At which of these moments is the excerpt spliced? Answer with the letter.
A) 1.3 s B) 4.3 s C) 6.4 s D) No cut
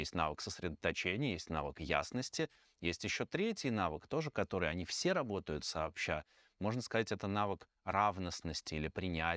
D